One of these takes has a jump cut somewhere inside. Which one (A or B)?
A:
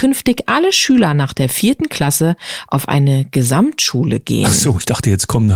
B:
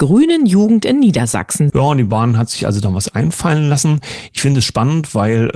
B